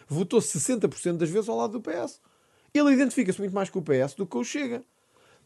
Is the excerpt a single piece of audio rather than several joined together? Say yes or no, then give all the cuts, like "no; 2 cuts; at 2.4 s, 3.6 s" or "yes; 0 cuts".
yes; 0 cuts